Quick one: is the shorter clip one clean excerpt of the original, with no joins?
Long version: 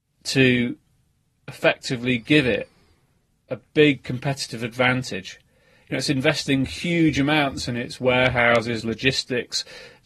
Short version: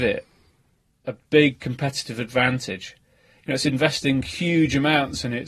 yes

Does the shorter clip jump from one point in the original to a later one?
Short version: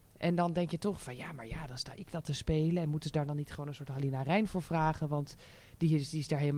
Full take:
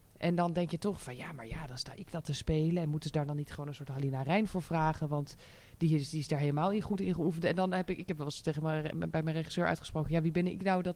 no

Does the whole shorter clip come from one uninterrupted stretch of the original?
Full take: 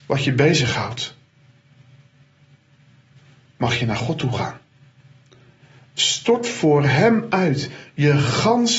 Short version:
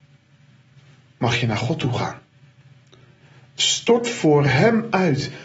yes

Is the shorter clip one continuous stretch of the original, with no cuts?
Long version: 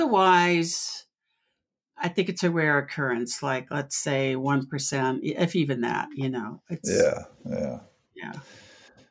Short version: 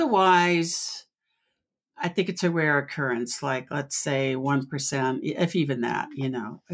yes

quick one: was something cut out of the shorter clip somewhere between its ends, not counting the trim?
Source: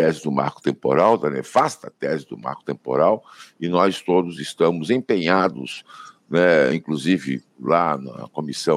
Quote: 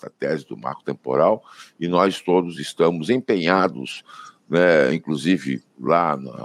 no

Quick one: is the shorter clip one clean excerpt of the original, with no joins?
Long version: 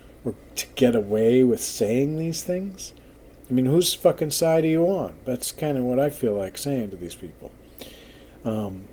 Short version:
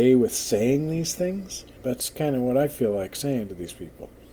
no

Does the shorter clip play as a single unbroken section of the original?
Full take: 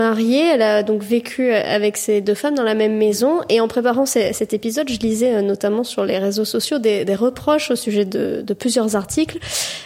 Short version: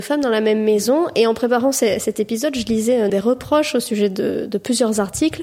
no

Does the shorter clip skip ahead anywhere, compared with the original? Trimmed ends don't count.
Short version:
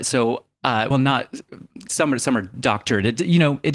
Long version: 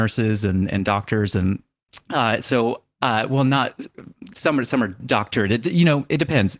yes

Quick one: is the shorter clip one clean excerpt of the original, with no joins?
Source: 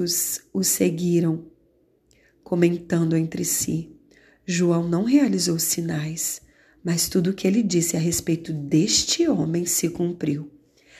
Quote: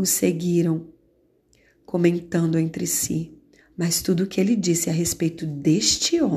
no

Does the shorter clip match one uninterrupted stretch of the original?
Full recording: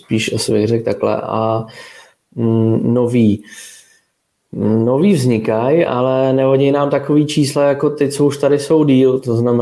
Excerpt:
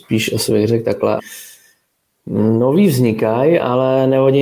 no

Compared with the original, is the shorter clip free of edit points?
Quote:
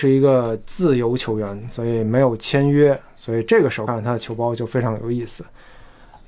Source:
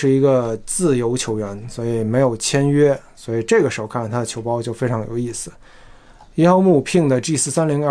no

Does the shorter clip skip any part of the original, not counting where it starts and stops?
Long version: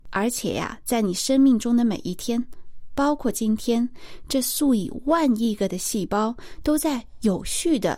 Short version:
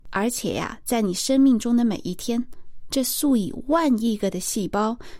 yes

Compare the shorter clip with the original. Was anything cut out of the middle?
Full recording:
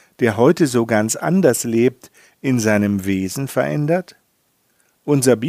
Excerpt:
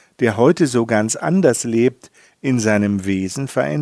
no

